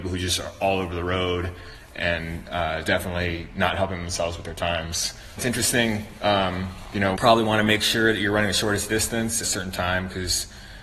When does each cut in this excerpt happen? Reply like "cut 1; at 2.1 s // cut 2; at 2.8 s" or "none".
cut 1; at 5.4 s // cut 2; at 7.2 s // cut 3; at 9.4 s